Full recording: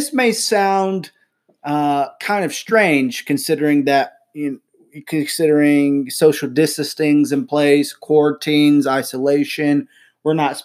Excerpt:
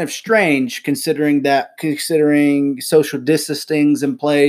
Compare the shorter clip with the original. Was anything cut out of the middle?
yes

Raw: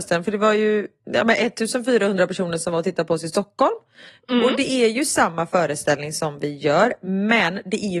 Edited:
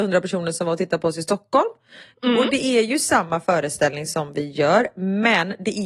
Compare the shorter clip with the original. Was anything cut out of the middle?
no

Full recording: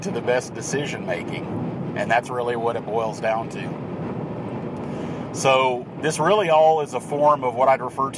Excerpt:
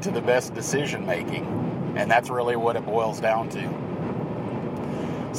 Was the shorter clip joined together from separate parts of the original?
no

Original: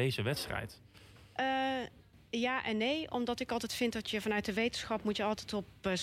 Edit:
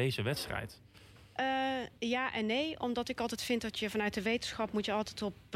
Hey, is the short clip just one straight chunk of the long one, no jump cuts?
no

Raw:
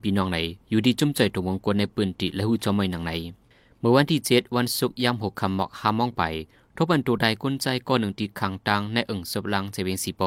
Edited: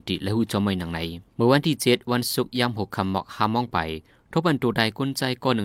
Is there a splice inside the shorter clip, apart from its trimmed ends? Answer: yes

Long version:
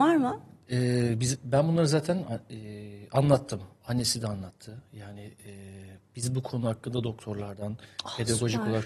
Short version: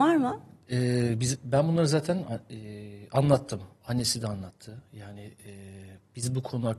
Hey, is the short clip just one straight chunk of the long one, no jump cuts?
yes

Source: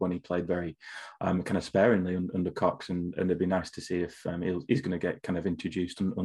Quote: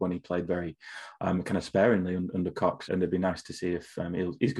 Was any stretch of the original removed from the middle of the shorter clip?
yes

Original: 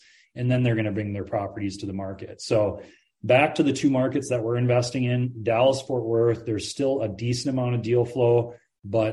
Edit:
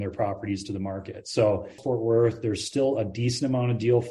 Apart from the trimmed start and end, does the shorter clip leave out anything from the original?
yes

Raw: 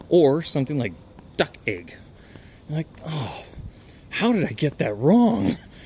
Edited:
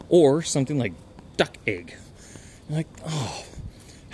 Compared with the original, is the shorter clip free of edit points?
yes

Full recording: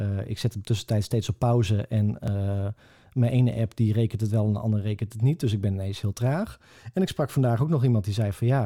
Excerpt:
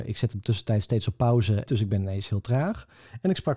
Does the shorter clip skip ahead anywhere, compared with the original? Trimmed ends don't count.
yes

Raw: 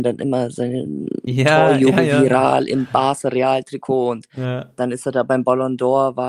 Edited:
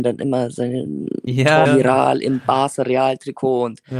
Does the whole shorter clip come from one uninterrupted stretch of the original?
no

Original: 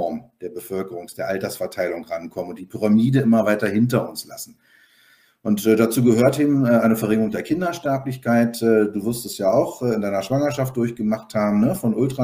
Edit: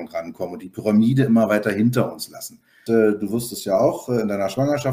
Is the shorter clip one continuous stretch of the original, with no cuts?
no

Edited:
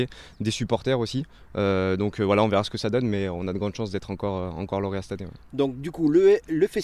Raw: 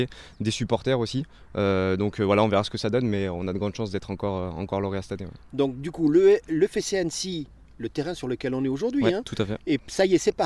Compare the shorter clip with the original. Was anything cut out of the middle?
no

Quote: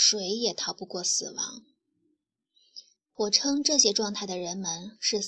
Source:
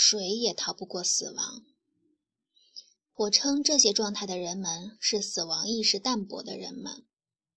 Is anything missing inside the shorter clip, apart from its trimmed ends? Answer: no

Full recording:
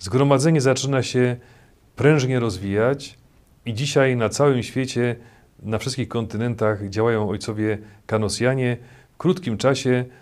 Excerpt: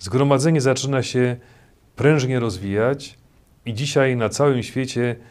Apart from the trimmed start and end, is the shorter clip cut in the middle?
no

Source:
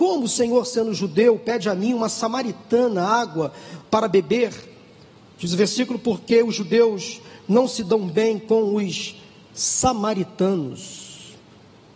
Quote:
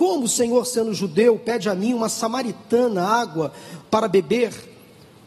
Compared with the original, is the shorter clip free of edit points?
yes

